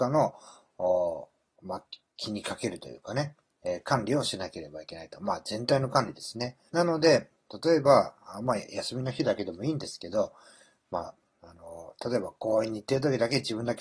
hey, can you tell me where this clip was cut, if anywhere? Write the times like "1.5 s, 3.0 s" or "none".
6.7 s